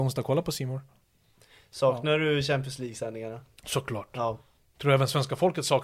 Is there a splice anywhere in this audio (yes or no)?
no